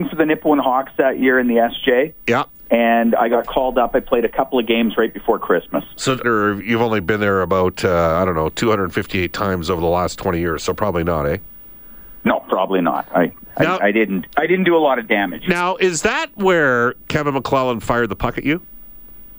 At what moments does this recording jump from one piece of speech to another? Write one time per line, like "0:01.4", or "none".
0:06.2